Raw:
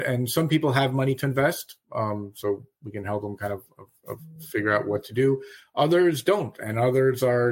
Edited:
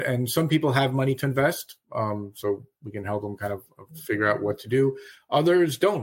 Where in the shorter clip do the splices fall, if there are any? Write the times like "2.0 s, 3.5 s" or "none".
3.9 s

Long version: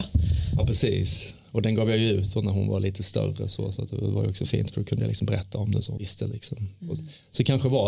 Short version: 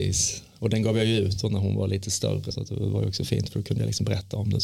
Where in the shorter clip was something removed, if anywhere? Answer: 2.5 s

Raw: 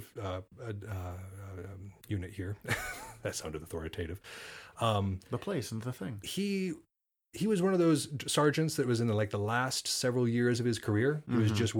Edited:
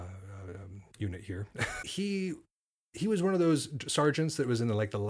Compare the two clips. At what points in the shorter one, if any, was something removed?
1.8 s

